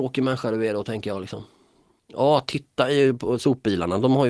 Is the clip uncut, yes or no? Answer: yes